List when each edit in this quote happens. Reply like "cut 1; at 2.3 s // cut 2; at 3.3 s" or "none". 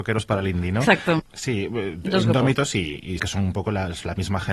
cut 1; at 1.2 s // cut 2; at 3.2 s